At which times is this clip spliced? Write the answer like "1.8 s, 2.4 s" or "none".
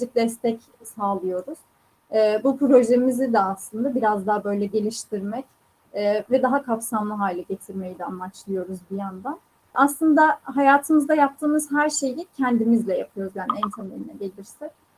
9.7 s